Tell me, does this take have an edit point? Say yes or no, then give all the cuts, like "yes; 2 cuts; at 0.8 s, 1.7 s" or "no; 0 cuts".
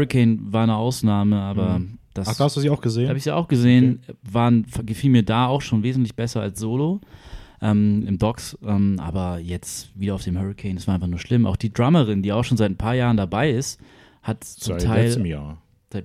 no; 0 cuts